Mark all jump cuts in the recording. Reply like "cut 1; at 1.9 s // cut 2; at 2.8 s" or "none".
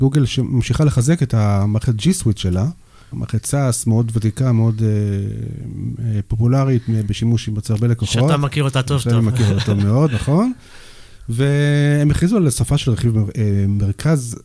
none

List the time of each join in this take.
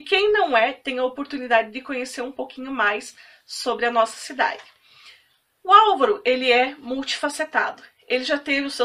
none

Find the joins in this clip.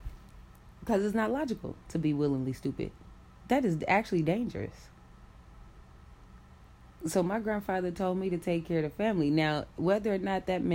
none

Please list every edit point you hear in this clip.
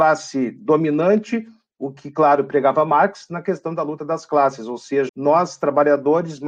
cut 1; at 5.1 s

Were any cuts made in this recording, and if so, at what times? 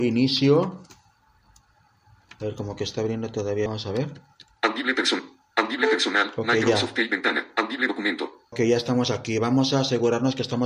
cut 1; at 3.7 s // cut 2; at 8.5 s

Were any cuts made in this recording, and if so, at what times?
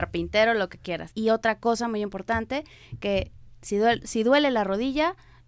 cut 1; at 1.1 s // cut 2; at 4.0 s

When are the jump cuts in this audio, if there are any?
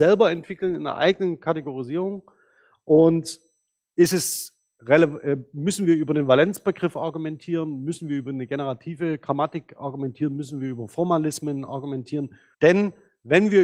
cut 1; at 12.5 s

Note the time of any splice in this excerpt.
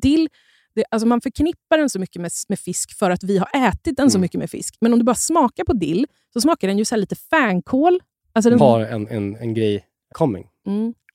cut 1; at 8.6 s // cut 2; at 10.1 s

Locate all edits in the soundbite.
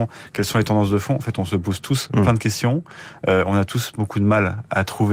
none

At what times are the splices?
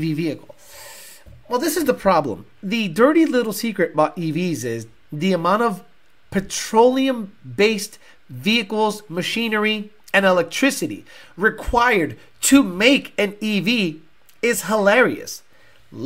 cut 1; at 2.5 s

